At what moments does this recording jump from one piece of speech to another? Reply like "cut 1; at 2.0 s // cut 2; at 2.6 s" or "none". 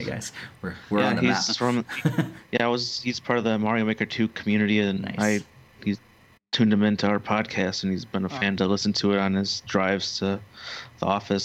none